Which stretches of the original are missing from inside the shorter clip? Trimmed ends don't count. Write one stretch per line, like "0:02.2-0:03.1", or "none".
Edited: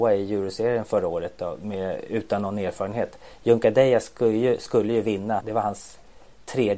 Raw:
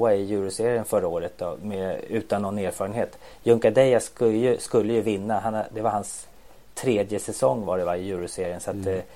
0:05.4-0:05.7

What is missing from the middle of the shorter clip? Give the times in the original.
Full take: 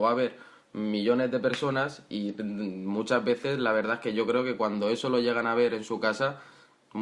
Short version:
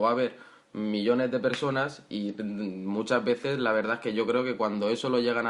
none

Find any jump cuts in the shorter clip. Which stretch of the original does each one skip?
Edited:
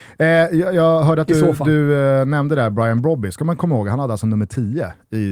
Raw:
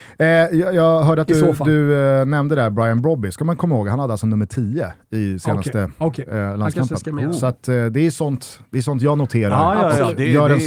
none

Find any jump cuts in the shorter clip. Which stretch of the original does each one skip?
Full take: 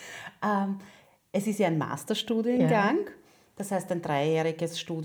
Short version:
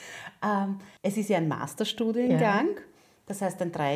0:01.0-0:01.3

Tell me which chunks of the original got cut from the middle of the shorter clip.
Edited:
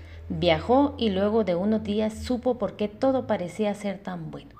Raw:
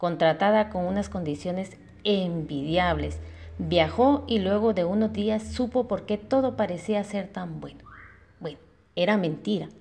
none

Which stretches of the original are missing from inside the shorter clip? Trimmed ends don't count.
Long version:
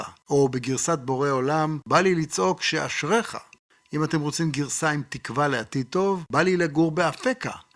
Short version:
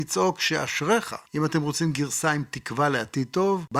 0:03.5-0:03.8

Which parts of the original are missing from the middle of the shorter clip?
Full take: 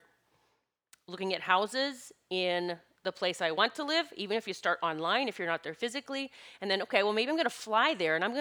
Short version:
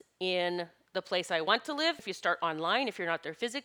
0:04.1-0:04.4

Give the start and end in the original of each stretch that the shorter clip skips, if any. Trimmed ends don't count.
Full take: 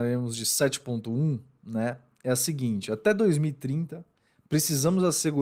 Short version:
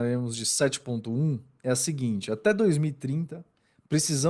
0:01.6-0:02.2

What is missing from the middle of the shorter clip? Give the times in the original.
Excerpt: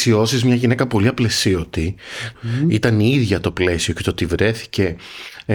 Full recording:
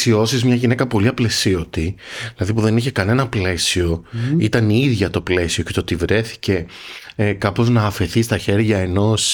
0:02.3-0:04.0

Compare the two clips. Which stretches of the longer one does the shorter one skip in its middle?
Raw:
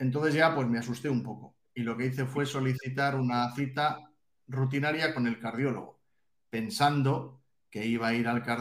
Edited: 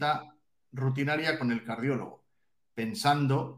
none

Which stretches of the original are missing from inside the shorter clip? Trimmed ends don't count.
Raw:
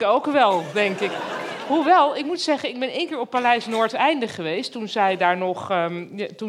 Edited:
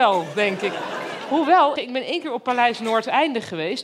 0:02.1-0:02.6

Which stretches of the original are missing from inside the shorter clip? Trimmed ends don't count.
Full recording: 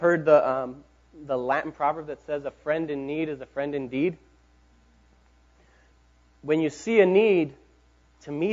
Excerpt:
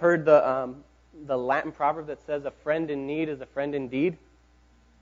none

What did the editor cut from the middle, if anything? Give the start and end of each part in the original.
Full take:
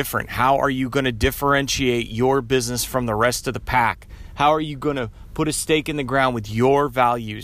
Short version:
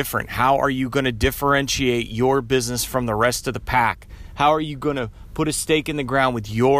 none

